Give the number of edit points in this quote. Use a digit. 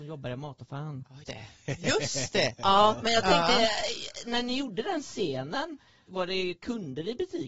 1